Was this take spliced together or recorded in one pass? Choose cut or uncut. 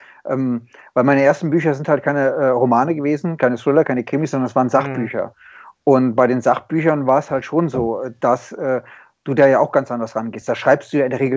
uncut